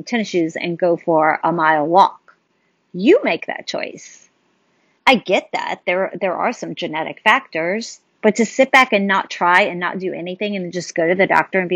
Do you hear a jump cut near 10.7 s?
no; 2 cuts; at 5.0 s, 8.1 s

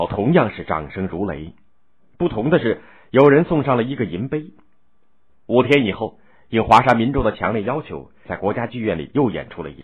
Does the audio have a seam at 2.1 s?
no; 2 cuts; at 5.3 s, 8.3 s

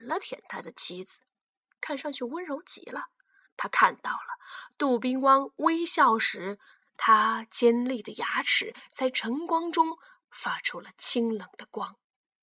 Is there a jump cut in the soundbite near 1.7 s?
no; 1 cut; at 3.5 s

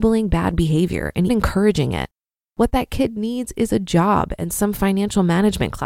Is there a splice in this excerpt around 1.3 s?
yes; 1 cut; at 1.3 s

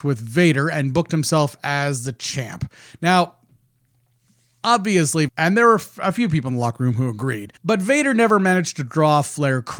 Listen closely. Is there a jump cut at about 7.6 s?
yes; 2 cuts; at 5.3 s, 7.6 s

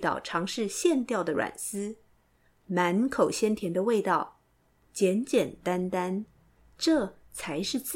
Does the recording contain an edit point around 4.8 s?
no; 1 cut; at 2.4 s

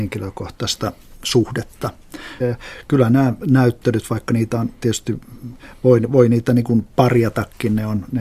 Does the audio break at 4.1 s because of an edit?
no; 1 cut; at 2.4 s

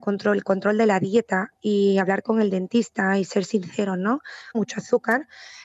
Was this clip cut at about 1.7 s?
no; 1 cut; at 4.5 s

